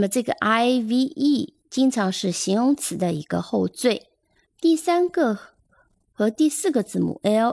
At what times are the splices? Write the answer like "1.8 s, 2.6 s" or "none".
4.4 s